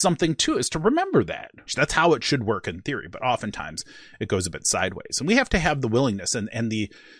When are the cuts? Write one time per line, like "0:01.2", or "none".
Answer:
0:01.7